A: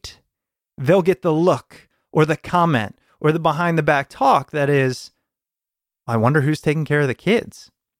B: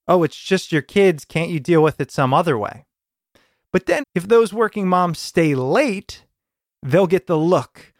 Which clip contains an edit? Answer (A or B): B